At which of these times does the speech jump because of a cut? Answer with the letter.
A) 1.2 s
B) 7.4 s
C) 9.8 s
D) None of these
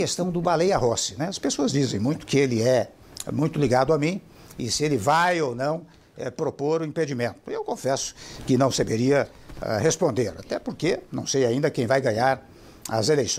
D